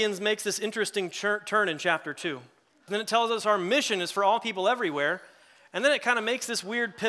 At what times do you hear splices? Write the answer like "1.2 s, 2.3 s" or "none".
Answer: 2.9 s

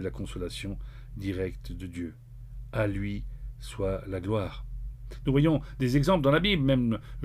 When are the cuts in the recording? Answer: none

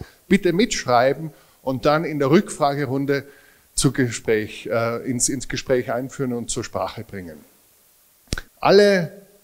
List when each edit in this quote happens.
8.5 s

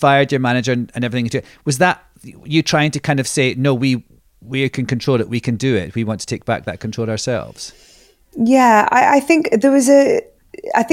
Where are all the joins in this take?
none

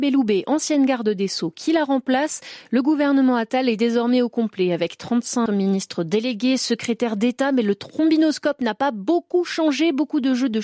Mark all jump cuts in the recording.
5.5 s

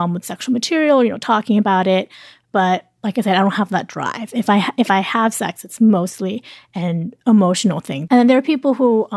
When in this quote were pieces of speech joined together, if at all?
8.1 s

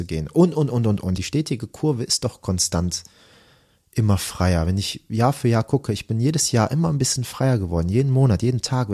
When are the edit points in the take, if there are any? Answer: 1.2 s

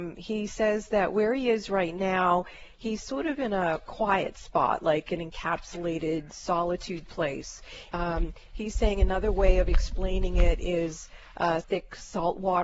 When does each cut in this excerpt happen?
7.9 s, 11.6 s

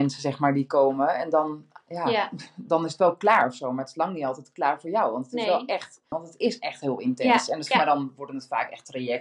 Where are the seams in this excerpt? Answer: 6.1 s, 7.7 s

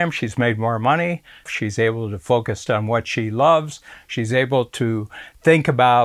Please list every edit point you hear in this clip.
1.5 s, 2.7 s

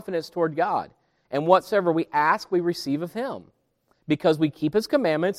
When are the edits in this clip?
none

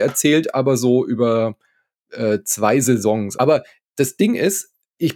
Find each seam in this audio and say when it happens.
3.3 s

